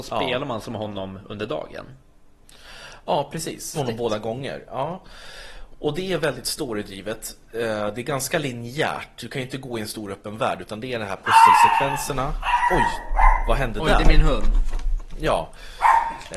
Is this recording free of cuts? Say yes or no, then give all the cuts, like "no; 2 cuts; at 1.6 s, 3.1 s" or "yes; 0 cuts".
no; 1 cut; at 3.7 s